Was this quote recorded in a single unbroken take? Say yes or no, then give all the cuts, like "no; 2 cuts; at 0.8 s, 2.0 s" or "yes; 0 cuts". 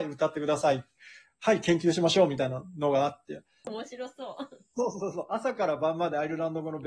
no; 1 cut; at 3.6 s